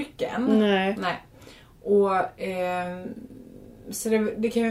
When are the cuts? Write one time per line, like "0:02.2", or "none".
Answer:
none